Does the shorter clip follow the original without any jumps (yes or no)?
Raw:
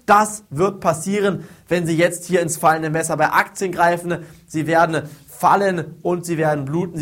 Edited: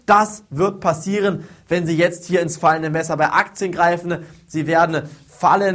yes